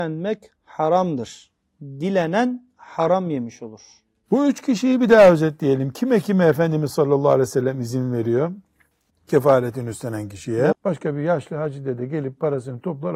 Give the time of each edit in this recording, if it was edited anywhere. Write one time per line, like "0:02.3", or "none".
0:09.1
0:10.7